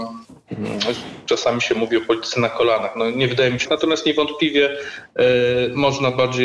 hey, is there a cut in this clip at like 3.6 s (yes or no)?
yes